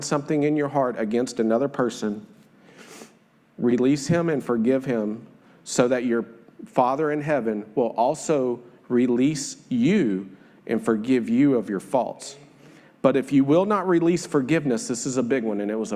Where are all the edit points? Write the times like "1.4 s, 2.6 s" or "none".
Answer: none